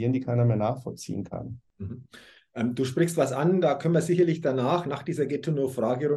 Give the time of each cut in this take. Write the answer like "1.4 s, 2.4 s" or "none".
none